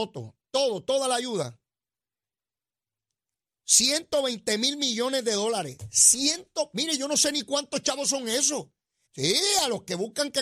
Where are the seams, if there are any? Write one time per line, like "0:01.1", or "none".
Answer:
0:09.1